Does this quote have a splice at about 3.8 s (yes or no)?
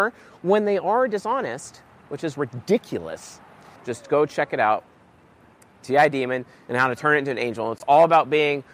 yes